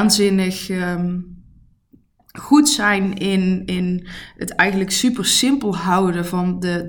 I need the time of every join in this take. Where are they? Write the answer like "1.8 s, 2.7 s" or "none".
none